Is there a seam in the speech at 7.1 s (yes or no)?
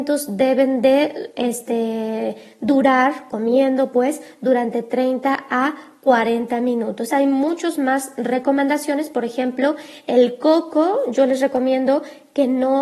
yes